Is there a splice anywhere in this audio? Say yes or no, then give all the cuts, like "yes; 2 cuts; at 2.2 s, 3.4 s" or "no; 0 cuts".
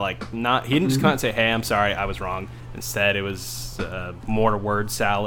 no; 0 cuts